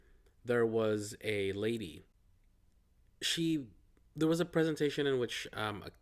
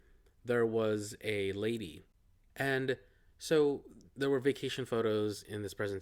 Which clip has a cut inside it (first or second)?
second